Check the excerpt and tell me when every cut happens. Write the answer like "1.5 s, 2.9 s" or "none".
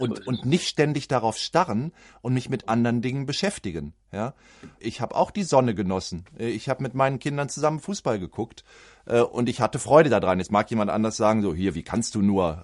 4.8 s